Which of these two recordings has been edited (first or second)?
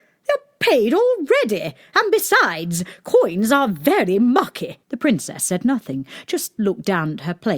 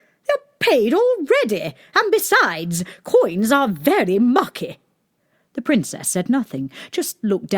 first